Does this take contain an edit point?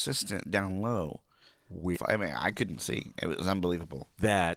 yes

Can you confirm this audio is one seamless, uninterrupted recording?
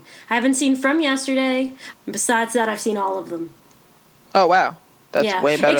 no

